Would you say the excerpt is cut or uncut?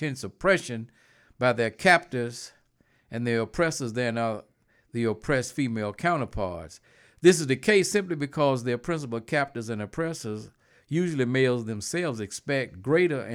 uncut